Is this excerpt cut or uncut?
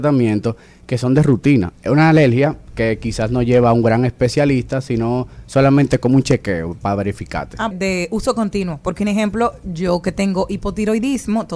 cut